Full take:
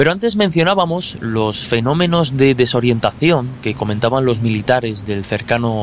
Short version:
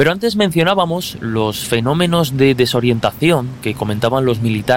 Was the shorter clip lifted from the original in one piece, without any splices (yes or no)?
yes